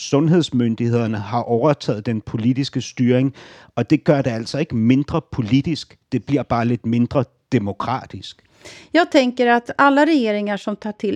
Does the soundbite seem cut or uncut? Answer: uncut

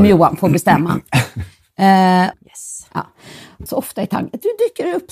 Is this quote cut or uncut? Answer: cut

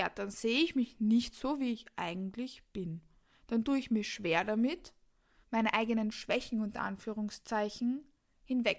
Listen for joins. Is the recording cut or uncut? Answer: cut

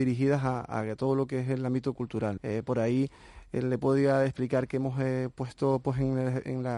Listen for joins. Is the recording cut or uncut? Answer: cut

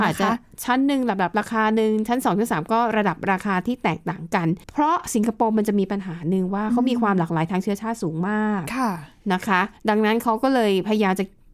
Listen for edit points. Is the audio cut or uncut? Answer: cut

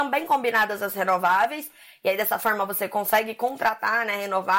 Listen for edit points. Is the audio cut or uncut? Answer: uncut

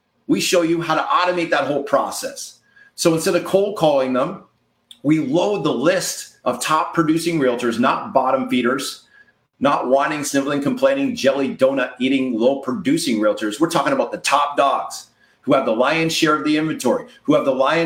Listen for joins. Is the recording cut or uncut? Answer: uncut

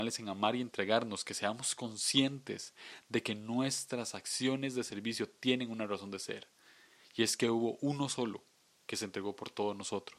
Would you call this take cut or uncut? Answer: uncut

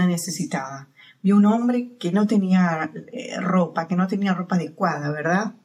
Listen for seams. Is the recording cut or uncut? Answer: uncut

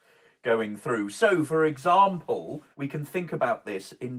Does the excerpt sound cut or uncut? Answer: cut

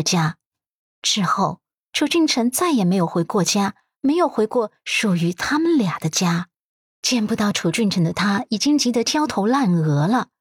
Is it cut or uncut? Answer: cut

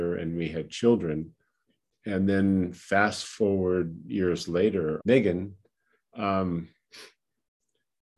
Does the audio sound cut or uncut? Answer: cut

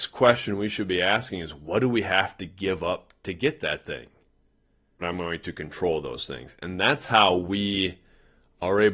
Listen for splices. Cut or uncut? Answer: cut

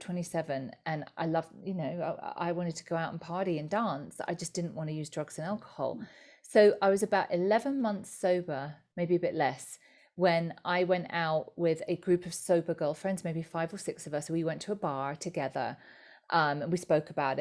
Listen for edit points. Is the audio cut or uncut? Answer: uncut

